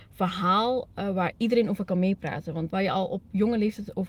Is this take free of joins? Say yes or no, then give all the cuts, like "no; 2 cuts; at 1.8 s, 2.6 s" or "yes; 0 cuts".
no; 1 cut; at 2.7 s